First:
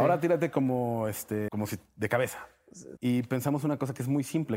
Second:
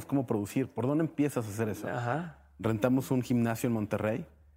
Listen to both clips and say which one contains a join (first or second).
first